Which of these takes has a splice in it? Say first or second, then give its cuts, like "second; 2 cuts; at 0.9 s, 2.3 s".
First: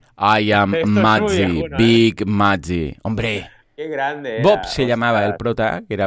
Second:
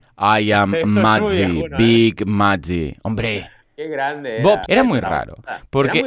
second; 1 cut; at 4.7 s